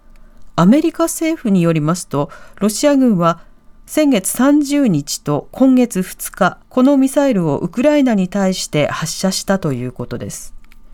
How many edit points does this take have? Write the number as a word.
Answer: one